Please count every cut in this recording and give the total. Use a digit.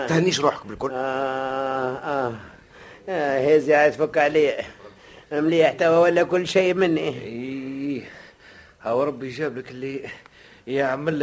0